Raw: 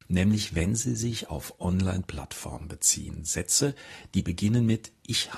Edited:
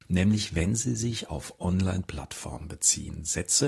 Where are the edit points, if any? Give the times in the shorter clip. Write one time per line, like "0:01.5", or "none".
none